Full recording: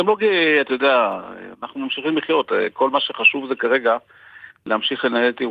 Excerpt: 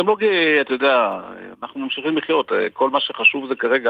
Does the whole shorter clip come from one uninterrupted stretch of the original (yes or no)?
yes